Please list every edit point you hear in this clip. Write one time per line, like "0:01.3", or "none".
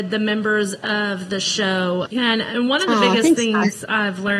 0:02.1